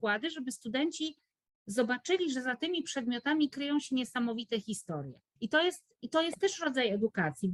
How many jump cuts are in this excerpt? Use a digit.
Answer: 1